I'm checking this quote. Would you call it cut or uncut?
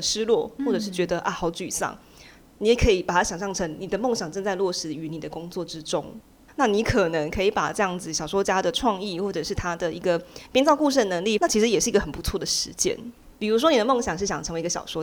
cut